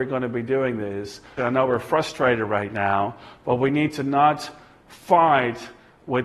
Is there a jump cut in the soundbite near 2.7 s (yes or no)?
no